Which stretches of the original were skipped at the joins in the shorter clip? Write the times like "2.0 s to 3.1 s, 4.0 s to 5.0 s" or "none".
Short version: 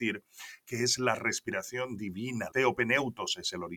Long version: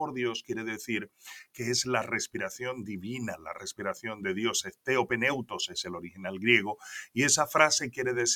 3.4 s to 4.8 s